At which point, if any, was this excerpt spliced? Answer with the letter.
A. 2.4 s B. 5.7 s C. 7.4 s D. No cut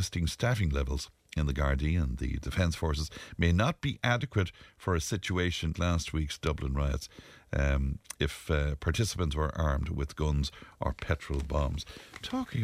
B